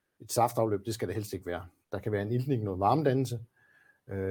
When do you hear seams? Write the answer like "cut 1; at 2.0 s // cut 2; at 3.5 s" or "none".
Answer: cut 1; at 1.8 s